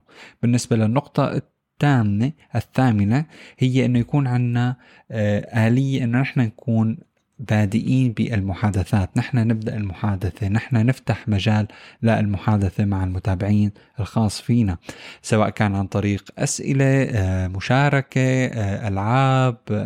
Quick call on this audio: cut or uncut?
uncut